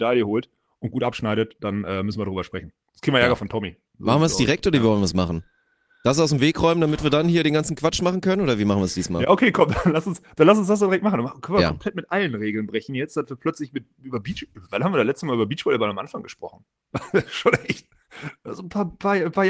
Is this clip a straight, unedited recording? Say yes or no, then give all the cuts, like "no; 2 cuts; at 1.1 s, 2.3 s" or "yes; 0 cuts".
yes; 0 cuts